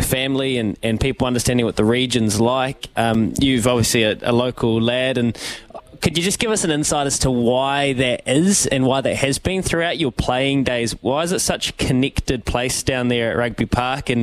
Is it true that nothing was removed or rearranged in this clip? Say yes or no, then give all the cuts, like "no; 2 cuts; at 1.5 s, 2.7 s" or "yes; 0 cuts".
yes; 0 cuts